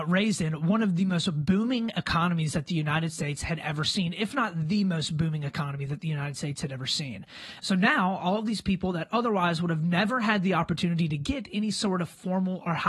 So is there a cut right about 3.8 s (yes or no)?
no